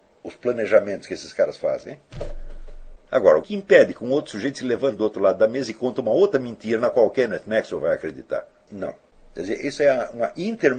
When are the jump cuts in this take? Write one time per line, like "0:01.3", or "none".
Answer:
0:03.4
0:08.7